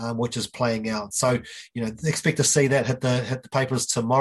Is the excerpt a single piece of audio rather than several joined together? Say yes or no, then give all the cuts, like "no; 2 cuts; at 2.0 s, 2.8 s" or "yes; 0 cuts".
yes; 0 cuts